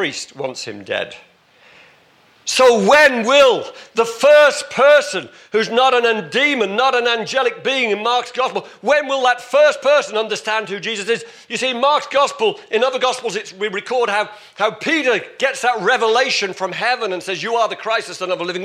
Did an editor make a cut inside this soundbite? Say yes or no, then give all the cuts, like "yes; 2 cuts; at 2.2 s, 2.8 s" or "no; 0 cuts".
no; 0 cuts